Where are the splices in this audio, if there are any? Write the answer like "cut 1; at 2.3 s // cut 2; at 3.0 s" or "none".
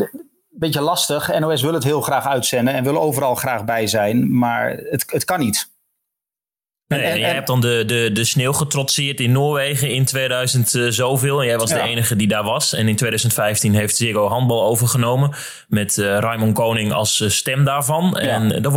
none